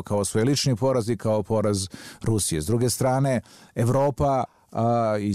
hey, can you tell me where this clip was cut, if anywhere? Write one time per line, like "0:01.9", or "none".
none